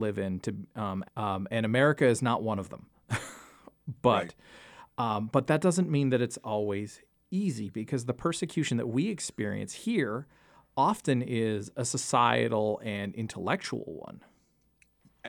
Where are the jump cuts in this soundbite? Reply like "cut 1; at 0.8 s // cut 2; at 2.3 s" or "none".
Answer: cut 1; at 1.0 s